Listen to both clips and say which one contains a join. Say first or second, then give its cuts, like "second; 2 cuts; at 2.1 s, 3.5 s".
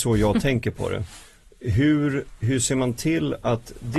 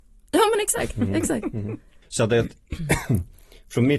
second; 1 cut; at 2.0 s